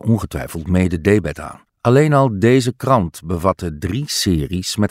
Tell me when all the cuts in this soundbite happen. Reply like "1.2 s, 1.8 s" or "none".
1.7 s